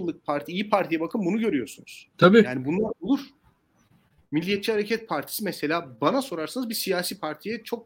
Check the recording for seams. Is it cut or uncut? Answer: cut